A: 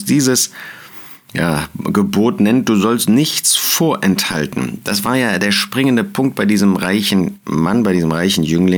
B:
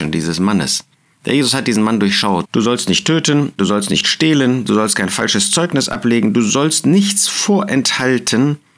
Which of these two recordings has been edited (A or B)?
B